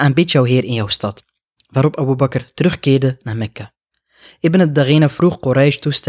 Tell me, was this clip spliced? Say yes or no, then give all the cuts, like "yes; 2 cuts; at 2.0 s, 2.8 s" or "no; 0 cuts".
no; 0 cuts